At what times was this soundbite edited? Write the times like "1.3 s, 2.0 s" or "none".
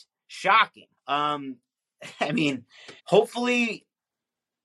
1.0 s, 3.0 s